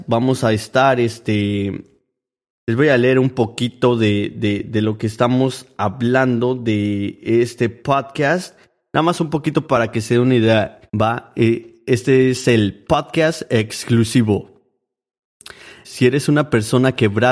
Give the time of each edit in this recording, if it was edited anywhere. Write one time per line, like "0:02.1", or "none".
0:10.9
0:15.8